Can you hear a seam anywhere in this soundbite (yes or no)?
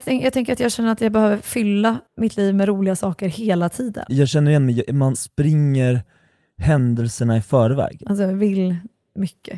yes